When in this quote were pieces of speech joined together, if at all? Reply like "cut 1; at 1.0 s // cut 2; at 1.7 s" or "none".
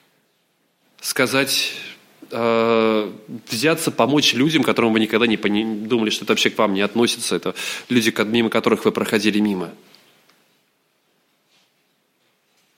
none

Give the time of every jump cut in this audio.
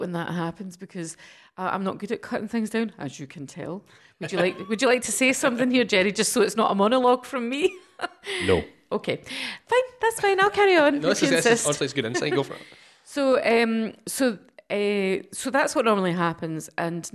none

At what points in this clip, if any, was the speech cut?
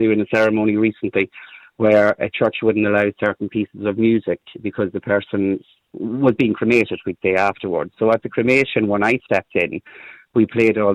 none

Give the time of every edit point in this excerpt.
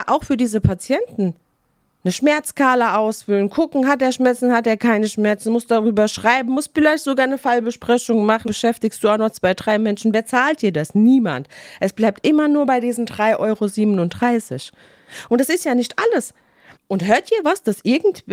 cut 1; at 8.4 s // cut 2; at 16.7 s

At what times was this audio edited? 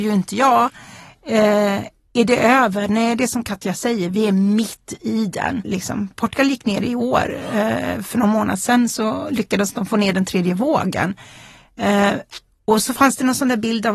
cut 1; at 5.6 s

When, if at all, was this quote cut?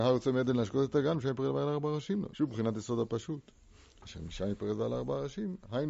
cut 1; at 2.3 s

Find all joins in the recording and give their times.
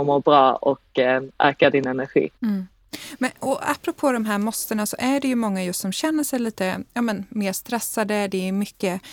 cut 1; at 2.4 s

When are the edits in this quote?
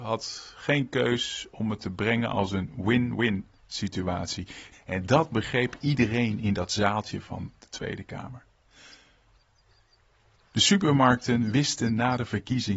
cut 1; at 4.7 s

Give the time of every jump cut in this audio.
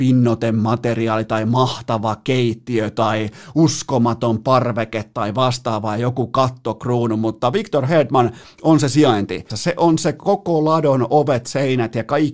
cut 1; at 9.5 s

